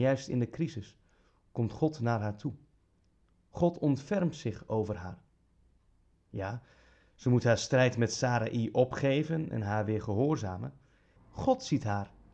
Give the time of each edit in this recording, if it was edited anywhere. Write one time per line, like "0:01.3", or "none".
0:11.2